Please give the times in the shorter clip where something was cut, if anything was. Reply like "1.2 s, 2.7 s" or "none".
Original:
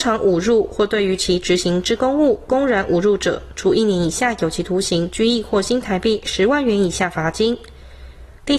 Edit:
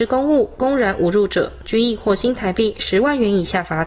1.6 s